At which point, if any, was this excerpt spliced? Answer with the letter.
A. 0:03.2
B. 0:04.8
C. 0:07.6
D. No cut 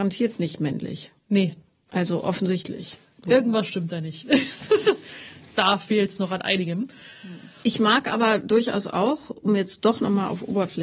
C